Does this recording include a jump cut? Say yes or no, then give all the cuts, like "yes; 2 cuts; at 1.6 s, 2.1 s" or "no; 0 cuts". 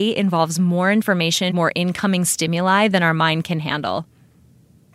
yes; 1 cut; at 1.5 s